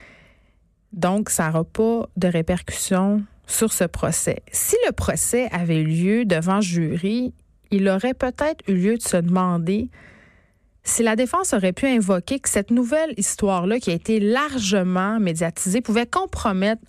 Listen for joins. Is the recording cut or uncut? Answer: uncut